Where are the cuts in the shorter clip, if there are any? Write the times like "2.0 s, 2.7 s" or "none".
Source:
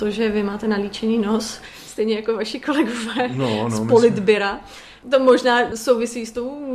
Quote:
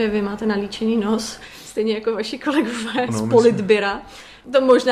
3.1 s